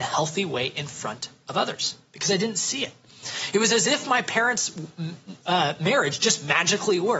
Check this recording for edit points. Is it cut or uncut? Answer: uncut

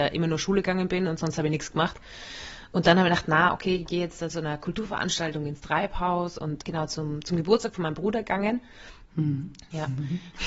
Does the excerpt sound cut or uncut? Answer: cut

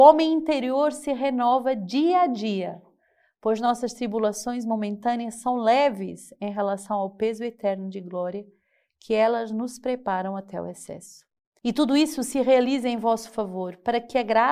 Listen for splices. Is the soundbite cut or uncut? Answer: cut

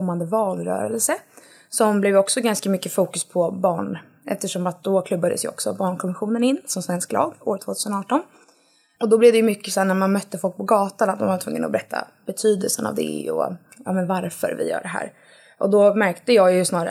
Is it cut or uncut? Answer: uncut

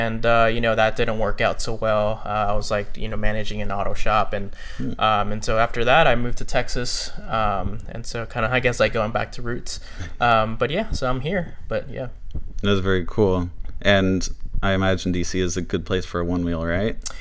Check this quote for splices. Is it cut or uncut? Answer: uncut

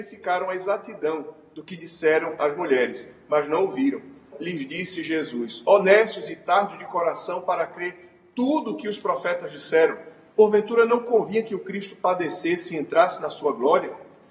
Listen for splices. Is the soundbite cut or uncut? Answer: cut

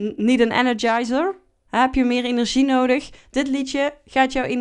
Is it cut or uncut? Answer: uncut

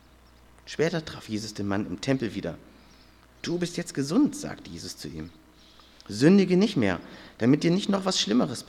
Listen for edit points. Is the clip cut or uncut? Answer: uncut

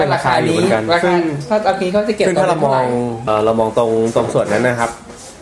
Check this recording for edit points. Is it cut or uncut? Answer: cut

